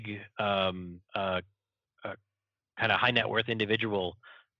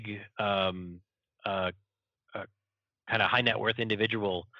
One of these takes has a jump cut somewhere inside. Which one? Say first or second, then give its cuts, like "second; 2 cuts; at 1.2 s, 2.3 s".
first; 1 cut; at 1.0 s